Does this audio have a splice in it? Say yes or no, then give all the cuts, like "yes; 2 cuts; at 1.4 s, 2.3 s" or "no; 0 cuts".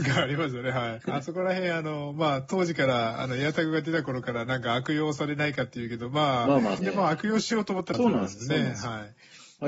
yes; 3 cuts; at 1.0 s, 6.8 s, 7.9 s